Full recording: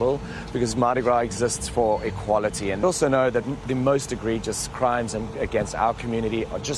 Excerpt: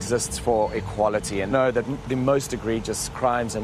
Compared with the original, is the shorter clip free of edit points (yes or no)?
no